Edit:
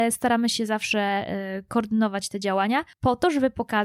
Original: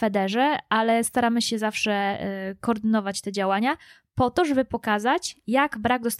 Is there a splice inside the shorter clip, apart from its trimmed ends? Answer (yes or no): yes